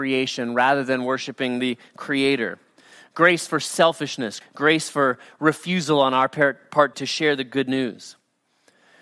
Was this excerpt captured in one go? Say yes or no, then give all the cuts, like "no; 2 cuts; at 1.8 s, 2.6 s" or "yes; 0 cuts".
no; 2 cuts; at 4.4 s, 6.9 s